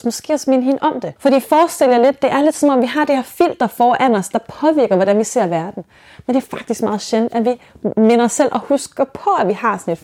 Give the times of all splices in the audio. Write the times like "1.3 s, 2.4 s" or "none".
1.2 s